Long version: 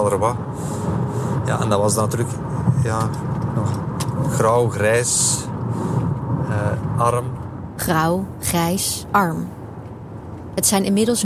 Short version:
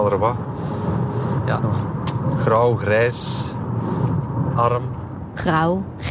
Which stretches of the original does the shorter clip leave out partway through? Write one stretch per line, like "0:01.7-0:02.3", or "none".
0:01.6-0:03.5
0:06.5-0:07.0